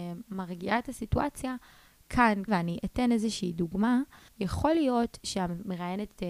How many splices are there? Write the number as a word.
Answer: two